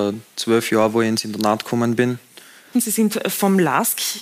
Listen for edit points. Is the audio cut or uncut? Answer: cut